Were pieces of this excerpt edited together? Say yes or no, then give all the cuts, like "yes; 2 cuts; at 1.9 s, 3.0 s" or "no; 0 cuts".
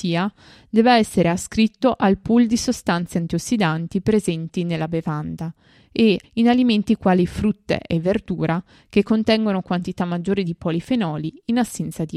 yes; 1 cut; at 6.2 s